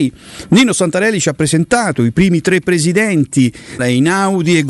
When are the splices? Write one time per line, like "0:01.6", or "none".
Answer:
0:03.8